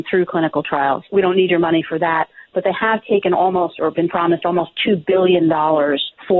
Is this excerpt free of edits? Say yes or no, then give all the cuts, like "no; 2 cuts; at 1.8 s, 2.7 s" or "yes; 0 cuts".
no; 1 cut; at 1.1 s